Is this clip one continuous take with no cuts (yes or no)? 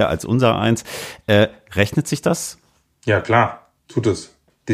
yes